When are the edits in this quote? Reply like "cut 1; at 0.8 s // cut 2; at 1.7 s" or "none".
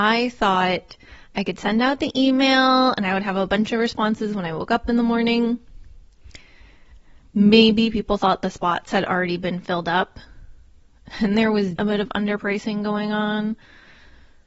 cut 1; at 7.2 s // cut 2; at 11.8 s

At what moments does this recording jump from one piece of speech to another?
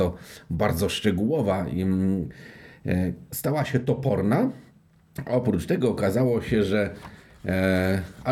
none

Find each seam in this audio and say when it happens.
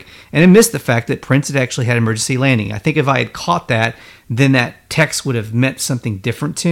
none

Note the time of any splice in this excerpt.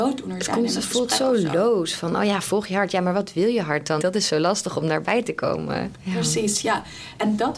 cut 1; at 4.0 s // cut 2; at 5.9 s

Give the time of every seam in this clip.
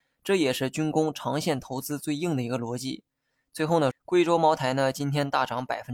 cut 1; at 3.9 s

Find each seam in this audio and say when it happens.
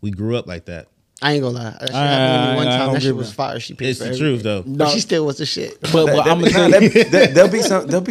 none

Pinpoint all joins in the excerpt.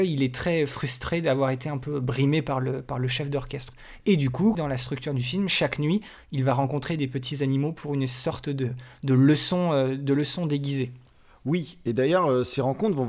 cut 1; at 4.5 s

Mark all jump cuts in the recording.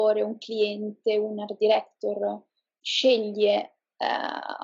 none

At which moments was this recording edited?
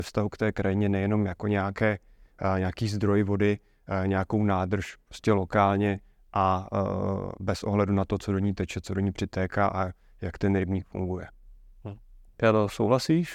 none

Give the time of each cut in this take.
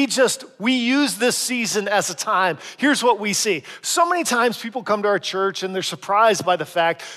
none

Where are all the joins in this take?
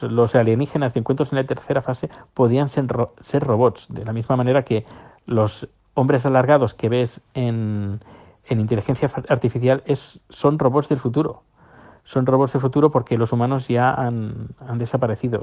none

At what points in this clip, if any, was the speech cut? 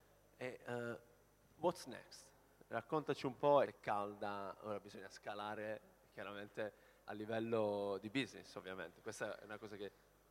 cut 1; at 3.6 s // cut 2; at 7.1 s

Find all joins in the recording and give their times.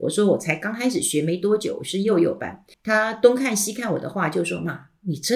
cut 1; at 2.7 s

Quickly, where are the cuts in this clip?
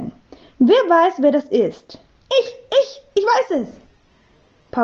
cut 1; at 2.2 s

